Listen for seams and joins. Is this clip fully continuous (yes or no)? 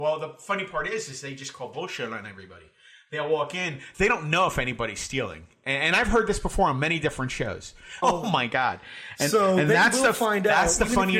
no